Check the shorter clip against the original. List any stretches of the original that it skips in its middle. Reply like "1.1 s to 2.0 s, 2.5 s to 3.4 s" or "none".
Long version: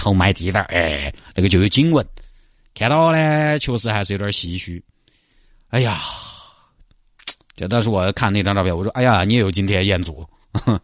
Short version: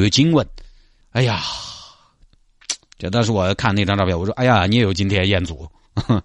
2.6 s to 5.6 s